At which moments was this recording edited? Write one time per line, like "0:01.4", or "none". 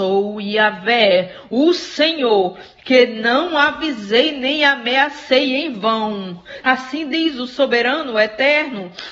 0:06.6